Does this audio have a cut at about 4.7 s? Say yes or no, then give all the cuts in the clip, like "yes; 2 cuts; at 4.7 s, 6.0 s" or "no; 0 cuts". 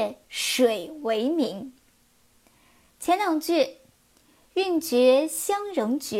no; 1 cut; at 2.9 s